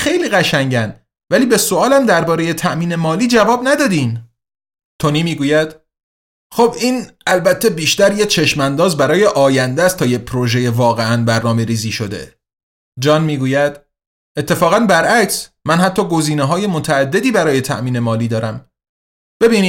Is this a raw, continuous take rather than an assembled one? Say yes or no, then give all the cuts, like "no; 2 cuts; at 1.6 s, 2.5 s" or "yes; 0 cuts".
yes; 0 cuts